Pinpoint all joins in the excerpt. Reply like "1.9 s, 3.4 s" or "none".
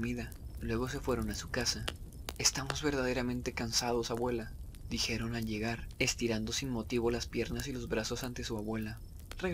none

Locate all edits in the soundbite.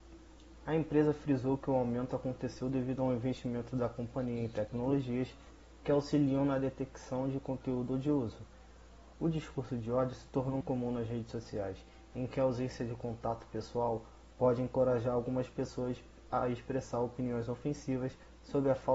9.1 s, 10.6 s

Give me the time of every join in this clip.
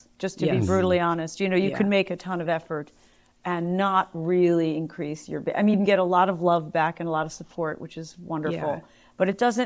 none

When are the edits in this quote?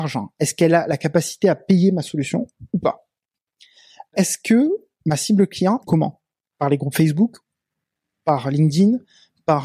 4.1 s, 5.8 s

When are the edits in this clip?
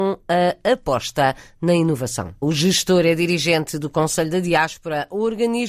2.4 s

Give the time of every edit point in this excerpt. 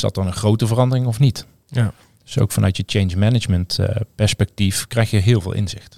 none

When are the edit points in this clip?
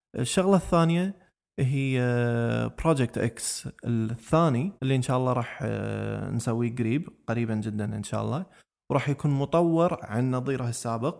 4.8 s

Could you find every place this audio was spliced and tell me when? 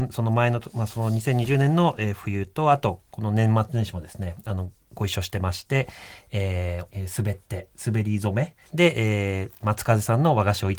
6.9 s, 8.7 s

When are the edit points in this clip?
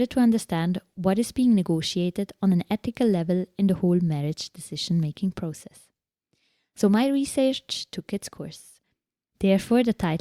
9.3 s

